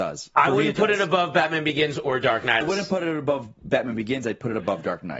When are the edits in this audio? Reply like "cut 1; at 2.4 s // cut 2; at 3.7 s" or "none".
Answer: cut 1; at 2.6 s